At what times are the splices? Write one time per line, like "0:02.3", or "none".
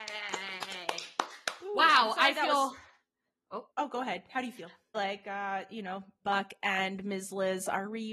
0:03.7
0:04.9
0:06.2